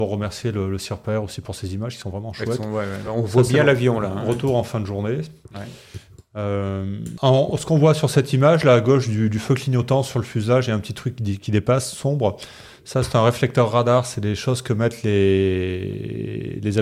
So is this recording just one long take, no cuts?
yes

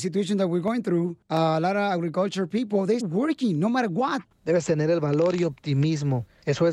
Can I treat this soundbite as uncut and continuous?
no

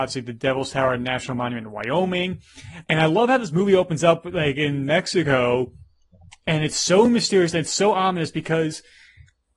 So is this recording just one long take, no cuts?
no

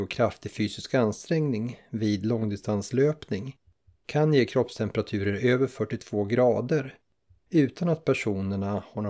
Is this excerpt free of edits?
yes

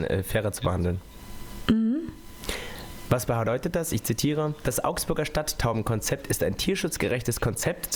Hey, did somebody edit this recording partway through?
yes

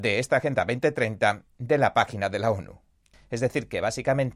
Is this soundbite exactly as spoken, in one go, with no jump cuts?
no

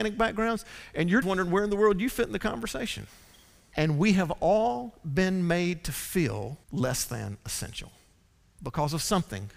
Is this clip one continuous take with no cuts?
no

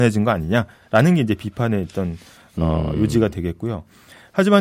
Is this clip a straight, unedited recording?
yes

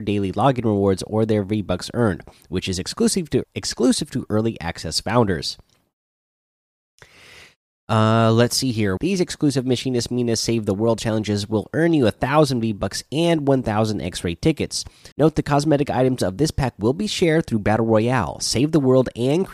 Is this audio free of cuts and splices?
no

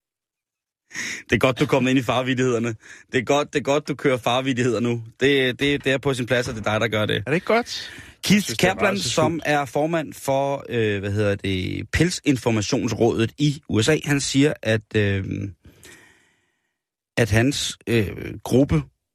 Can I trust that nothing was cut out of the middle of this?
yes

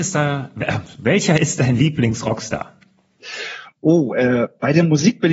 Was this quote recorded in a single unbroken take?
yes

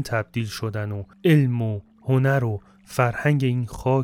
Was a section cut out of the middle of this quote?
yes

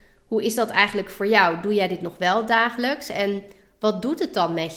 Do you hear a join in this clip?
no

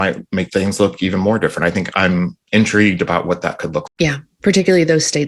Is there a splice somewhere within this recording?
yes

